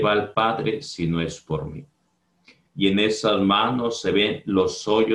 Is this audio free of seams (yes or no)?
no